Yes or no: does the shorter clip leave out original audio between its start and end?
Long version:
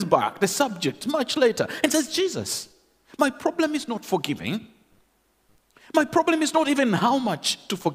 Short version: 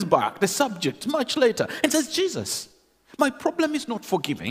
no